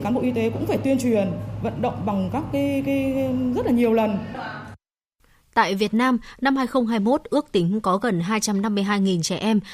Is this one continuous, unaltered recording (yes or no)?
yes